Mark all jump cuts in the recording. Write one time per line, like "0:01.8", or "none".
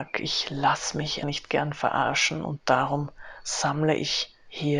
0:01.2